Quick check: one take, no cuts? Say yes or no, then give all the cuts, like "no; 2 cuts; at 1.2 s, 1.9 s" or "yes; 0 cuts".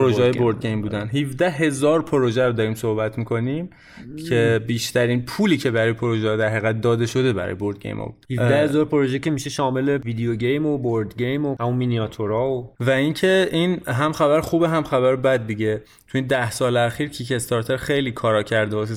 yes; 0 cuts